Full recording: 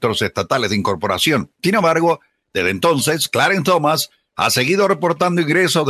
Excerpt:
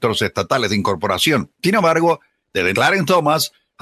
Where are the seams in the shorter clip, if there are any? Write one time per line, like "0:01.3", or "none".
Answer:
0:02.7